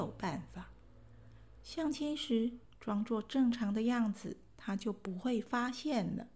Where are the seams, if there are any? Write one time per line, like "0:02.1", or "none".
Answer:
0:02.6